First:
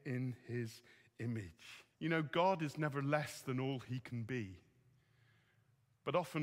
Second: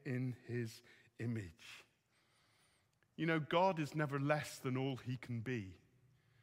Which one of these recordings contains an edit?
first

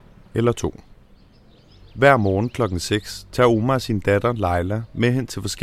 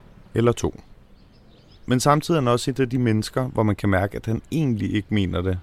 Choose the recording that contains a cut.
second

